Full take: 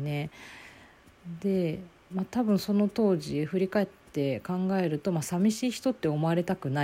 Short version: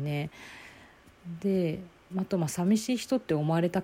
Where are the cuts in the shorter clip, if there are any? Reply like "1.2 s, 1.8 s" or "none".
2.3 s